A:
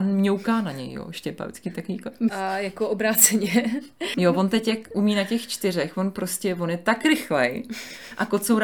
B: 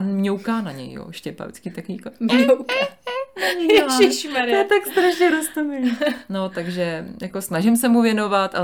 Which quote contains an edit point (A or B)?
A